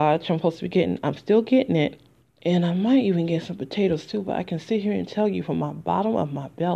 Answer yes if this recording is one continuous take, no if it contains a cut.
no